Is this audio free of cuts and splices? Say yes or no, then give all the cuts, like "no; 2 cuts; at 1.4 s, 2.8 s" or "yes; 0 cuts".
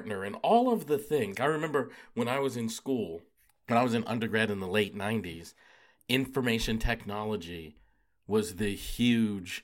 no; 1 cut; at 1.3 s